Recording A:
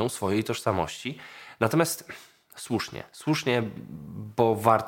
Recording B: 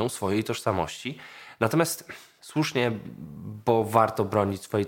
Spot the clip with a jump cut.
B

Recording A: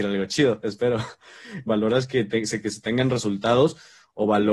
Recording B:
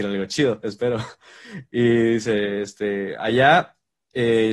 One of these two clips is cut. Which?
A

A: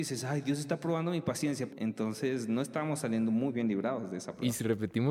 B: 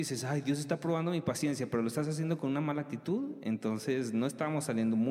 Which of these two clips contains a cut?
A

